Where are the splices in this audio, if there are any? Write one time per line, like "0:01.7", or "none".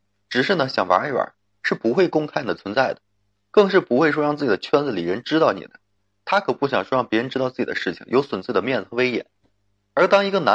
none